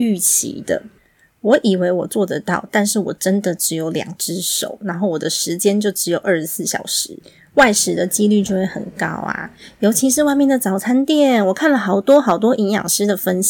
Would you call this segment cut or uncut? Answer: uncut